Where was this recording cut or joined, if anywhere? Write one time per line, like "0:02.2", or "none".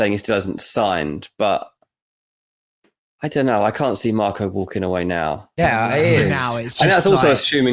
0:05.6